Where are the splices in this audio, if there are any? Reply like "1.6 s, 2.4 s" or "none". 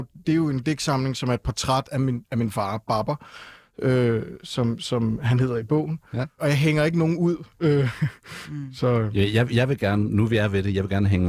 6.4 s